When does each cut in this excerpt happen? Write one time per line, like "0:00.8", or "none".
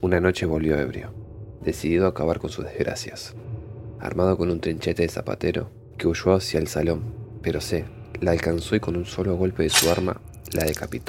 0:05.9